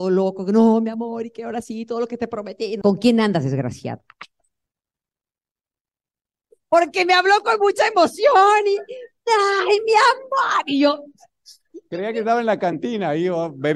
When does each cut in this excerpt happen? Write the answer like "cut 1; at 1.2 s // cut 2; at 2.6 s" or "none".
cut 1; at 2.8 s